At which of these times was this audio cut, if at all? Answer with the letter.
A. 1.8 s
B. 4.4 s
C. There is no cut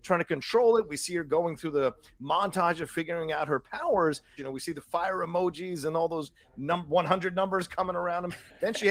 B